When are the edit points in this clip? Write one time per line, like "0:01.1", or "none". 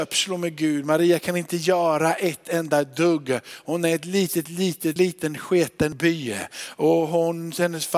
0:05.0